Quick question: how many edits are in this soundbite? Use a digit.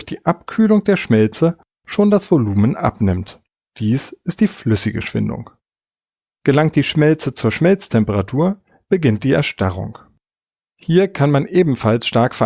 0